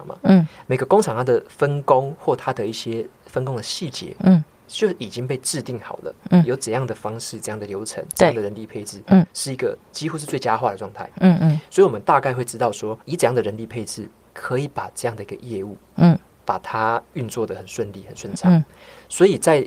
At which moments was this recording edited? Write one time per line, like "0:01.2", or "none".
0:13.0